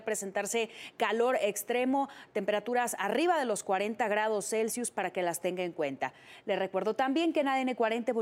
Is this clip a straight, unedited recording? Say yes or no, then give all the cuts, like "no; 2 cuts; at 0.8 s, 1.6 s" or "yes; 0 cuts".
yes; 0 cuts